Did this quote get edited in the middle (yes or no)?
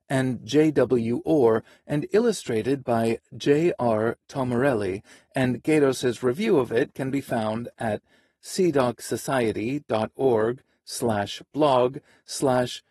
no